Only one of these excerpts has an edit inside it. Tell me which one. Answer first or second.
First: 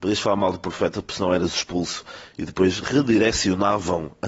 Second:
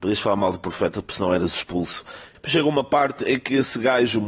second